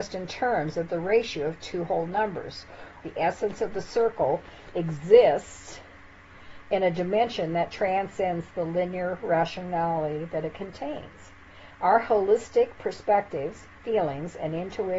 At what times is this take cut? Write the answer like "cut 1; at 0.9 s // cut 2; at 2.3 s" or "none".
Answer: cut 1; at 3.0 s